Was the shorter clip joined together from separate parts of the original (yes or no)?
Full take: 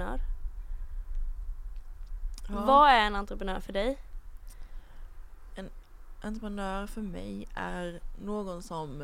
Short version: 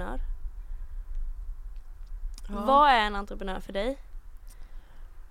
no